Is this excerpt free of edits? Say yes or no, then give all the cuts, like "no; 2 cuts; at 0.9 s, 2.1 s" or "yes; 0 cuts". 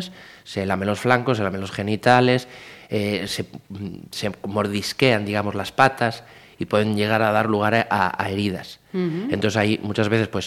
no; 1 cut; at 3.3 s